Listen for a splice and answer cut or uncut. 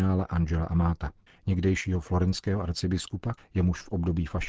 cut